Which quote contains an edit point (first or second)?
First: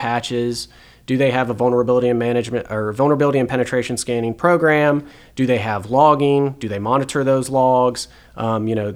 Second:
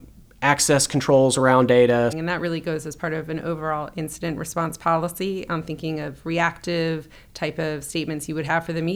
second